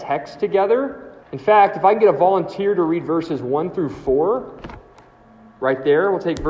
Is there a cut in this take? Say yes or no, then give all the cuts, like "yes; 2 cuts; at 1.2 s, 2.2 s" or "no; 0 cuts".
yes; 1 cut; at 1.2 s